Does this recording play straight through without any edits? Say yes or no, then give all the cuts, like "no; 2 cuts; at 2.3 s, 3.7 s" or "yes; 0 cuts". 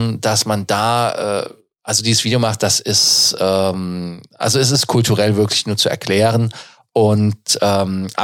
yes; 0 cuts